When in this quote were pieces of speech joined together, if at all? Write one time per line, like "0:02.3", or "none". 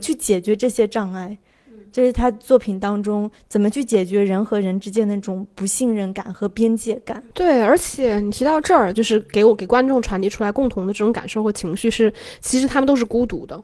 0:08.9